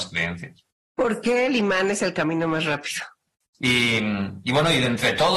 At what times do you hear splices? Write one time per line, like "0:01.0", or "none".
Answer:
0:03.5